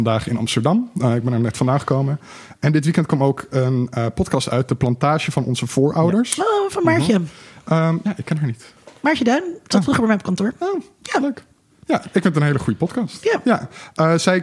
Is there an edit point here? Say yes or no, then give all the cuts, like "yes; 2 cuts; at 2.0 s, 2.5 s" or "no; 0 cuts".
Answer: no; 0 cuts